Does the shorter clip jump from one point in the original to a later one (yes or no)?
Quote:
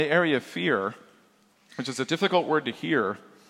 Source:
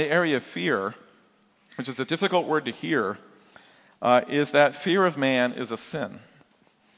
no